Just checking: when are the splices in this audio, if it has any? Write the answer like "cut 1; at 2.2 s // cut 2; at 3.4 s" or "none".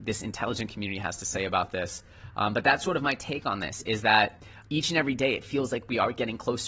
cut 1; at 4.6 s